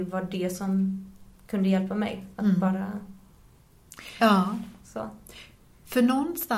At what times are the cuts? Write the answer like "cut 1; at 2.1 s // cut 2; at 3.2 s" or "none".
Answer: cut 1; at 4.2 s

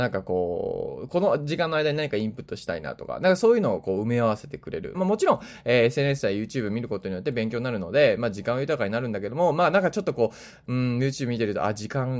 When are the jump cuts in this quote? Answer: cut 1; at 4.9 s

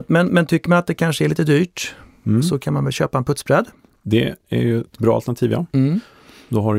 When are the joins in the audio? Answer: none

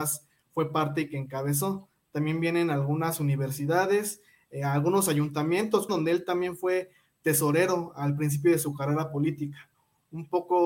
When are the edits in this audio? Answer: cut 1; at 5.9 s

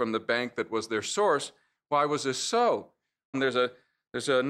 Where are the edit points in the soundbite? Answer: cut 1; at 3.3 s

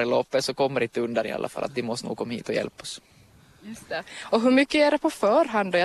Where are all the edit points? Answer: none

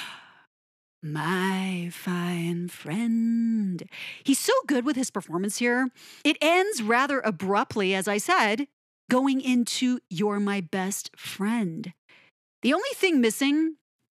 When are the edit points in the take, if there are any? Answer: cut 1; at 6.2 s

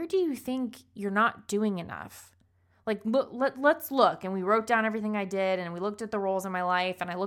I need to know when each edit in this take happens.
none

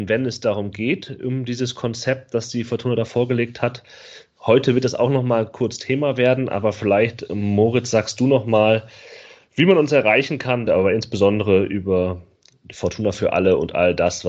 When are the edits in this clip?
cut 1; at 7.3 s // cut 2; at 10.7 s

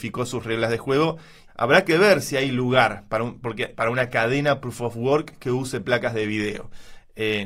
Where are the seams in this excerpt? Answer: cut 1; at 1.5 s // cut 2; at 3.7 s

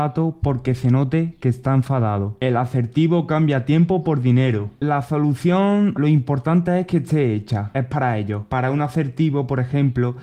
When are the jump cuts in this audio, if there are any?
cut 1; at 6.0 s

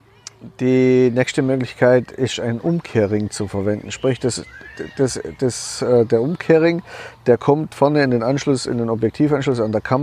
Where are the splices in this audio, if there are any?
none

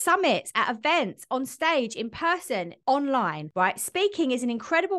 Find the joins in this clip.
none

